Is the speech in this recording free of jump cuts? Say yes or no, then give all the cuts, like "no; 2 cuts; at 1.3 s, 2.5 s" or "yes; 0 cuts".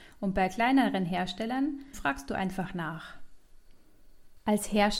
no; 1 cut; at 1.9 s